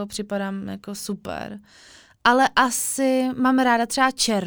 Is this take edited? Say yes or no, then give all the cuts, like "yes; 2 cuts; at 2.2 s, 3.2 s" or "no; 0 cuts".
no; 0 cuts